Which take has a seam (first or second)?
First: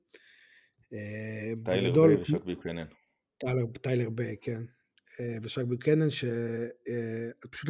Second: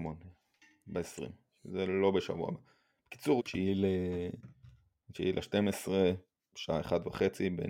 second